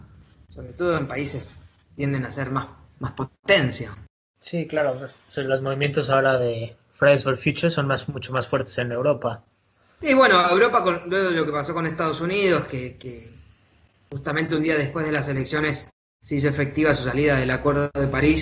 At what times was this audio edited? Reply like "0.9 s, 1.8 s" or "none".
none